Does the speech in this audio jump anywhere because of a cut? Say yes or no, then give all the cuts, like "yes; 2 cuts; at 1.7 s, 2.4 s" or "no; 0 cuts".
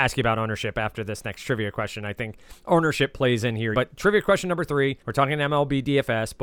yes; 2 cuts; at 3.7 s, 5.0 s